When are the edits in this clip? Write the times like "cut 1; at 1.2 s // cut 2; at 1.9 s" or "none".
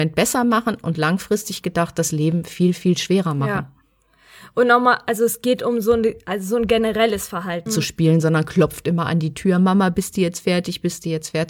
cut 1; at 7.7 s